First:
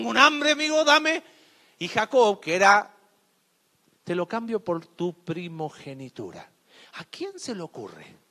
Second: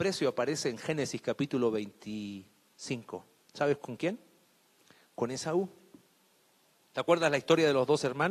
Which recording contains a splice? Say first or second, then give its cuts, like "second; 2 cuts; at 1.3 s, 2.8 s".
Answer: first; 1 cut; at 3.9 s